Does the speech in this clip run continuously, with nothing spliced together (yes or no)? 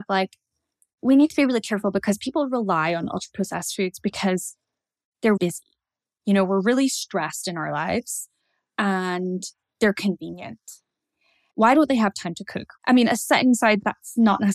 no